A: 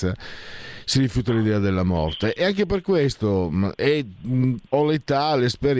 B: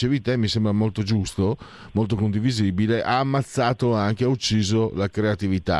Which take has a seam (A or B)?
A